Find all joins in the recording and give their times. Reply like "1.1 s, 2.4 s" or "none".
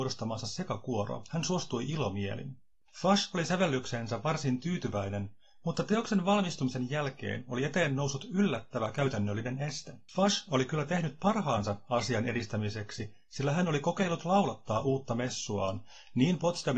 2.8 s, 10.1 s